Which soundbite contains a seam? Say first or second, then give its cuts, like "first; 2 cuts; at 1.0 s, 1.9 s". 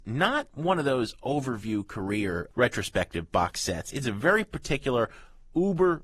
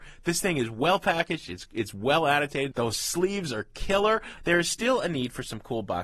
second; 2 cuts; at 2.7 s, 4.4 s